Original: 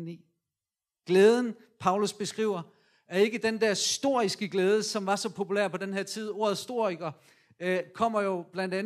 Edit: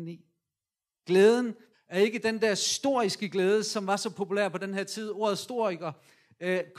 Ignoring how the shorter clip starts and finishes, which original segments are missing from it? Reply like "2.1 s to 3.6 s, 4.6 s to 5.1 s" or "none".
1.7 s to 2.9 s

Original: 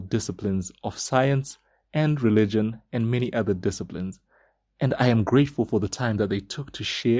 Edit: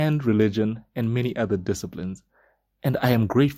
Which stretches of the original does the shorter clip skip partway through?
none

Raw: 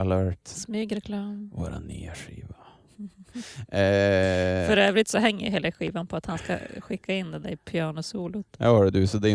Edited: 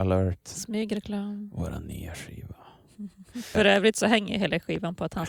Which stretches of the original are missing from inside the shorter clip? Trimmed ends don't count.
3.5 s to 4.7 s

